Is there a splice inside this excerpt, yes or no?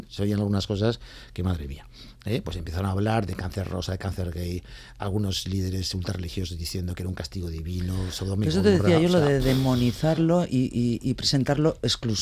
no